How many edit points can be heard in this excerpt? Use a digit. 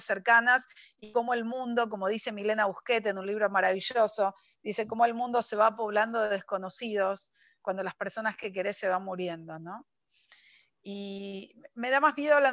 0